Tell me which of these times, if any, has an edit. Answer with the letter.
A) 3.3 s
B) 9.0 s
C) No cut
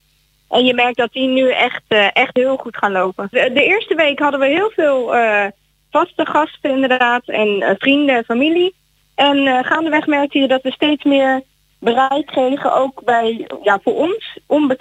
A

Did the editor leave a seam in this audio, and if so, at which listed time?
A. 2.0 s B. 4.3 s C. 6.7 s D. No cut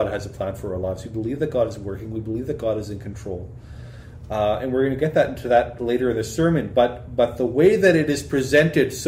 D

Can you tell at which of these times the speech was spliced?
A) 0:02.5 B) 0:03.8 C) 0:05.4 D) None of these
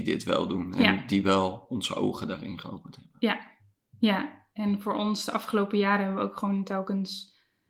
D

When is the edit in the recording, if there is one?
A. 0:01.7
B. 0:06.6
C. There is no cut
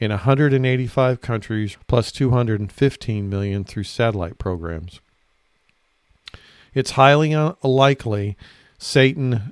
A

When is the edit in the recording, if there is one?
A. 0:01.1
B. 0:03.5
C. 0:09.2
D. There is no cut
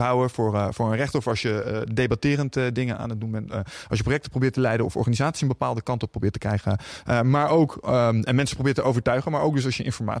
D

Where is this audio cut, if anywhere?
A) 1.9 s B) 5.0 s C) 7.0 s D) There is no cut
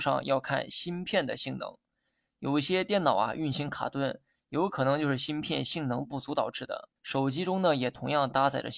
C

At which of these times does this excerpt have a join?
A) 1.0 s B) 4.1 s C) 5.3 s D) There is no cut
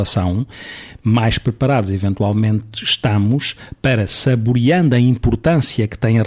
D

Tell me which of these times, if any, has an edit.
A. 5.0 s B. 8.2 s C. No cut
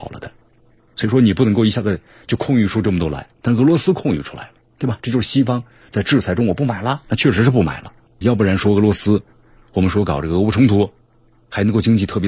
B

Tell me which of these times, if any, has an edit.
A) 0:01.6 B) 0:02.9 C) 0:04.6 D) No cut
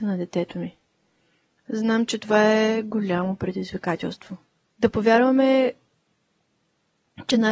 C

